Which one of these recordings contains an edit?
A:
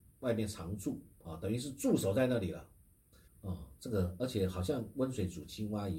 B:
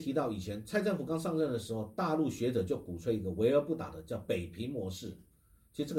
A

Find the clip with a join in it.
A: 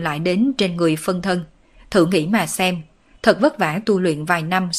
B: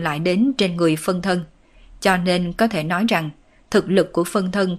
A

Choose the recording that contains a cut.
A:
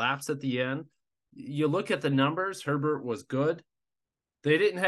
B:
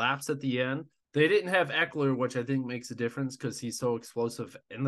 B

